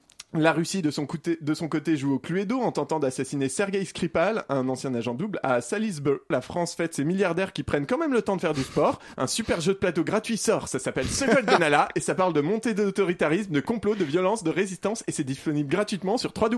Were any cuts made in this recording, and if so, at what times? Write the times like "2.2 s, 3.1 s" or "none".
6.3 s